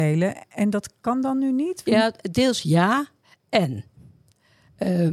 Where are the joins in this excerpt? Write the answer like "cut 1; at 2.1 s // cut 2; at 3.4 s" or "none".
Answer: cut 1; at 1.9 s